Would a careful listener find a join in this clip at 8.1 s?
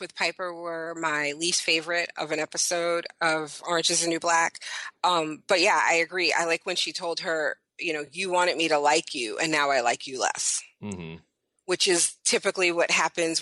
no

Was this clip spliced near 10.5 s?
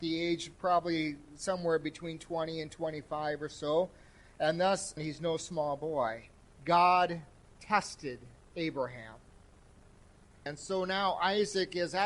yes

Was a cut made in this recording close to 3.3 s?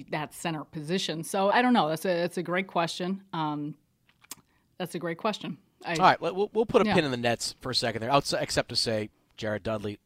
no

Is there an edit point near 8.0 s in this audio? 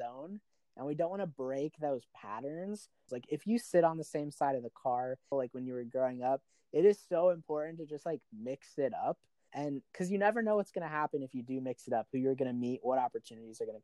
no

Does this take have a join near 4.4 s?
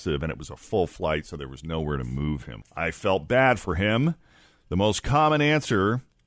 no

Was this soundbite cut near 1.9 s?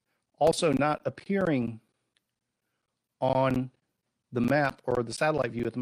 no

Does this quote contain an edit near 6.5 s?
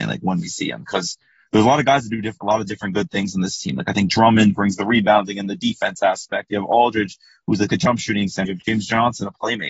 no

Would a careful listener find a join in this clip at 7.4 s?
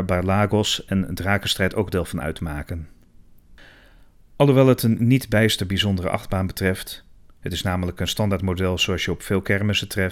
no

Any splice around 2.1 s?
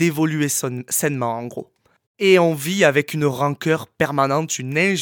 yes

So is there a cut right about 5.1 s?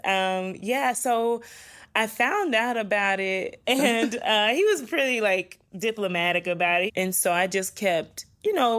no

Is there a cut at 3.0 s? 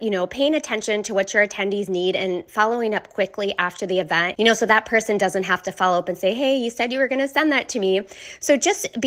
no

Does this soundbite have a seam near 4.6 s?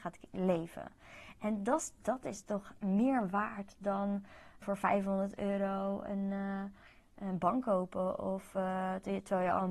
yes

